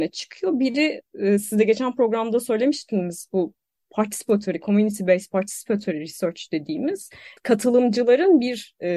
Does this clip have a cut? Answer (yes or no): yes